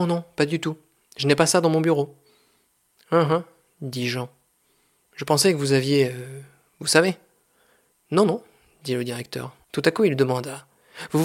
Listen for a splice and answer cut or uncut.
cut